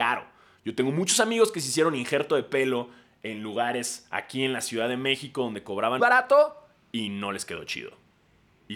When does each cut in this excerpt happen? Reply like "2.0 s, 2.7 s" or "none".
6.0 s